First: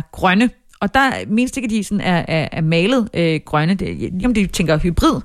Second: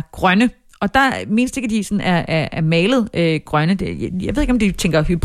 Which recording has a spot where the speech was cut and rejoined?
first; 1 cut; at 4.2 s

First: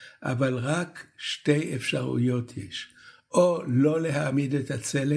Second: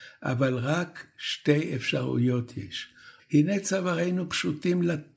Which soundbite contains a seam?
second; 1 cut; at 3.2 s

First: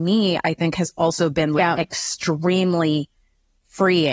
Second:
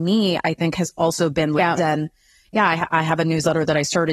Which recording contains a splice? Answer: second; 1 cut; at 1.8 s

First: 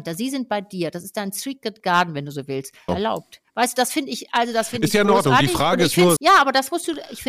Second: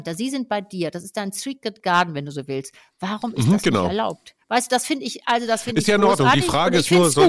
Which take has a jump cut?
first; 2 cuts; at 2.9 s, 6.2 s

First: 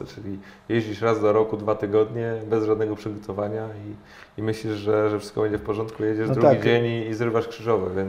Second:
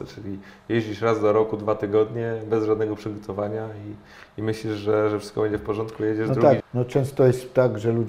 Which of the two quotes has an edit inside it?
second; 1 cut; at 6.6 s

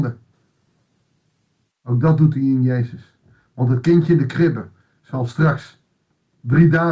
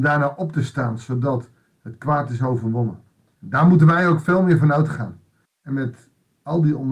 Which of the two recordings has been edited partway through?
second; 2 cuts; at 3.3 s, 5.5 s

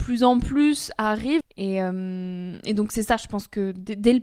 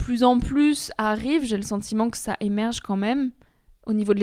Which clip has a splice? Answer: first; 1 cut; at 1.4 s

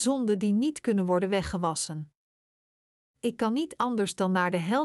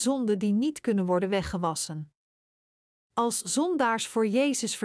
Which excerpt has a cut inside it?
first; 1 cut; at 3.0 s

